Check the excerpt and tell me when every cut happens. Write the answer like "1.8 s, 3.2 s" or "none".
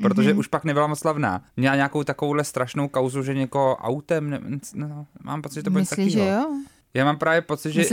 1.5 s, 6.8 s